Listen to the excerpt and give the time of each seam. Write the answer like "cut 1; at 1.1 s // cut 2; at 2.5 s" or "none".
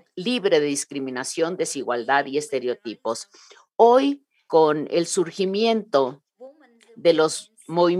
cut 1; at 4.5 s